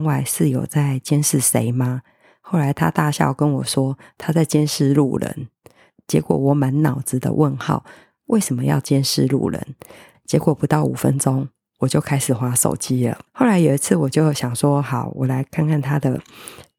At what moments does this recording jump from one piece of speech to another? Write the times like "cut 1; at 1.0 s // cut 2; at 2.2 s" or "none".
cut 1; at 10.1 s // cut 2; at 13.3 s